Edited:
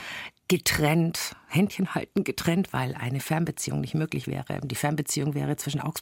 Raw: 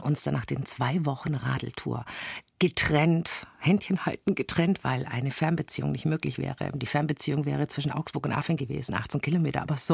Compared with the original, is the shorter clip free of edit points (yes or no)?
yes